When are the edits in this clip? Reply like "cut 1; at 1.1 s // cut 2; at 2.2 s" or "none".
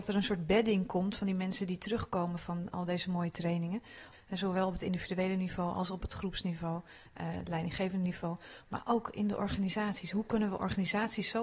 cut 1; at 4.1 s